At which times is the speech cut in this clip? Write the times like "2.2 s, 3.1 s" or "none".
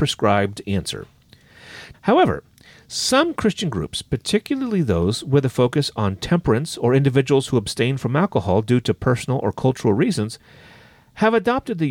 1.9 s